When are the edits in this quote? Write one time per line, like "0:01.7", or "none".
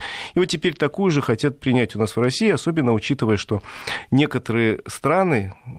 none